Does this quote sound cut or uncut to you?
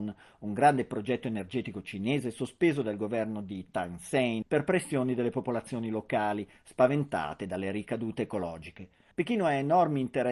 cut